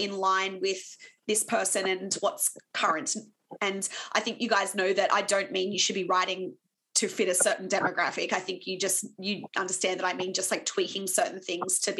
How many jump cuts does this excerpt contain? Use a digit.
0